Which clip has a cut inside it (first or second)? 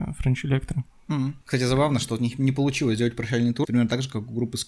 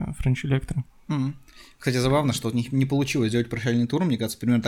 first